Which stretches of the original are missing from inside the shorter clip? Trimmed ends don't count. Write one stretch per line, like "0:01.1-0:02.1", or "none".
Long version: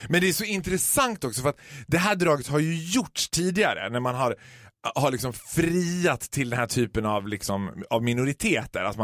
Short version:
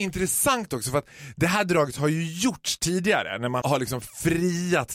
0:04.1-0:04.9